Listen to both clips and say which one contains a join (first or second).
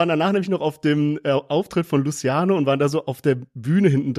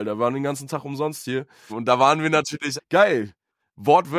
second